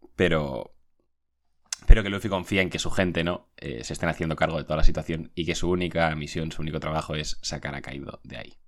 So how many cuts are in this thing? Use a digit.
0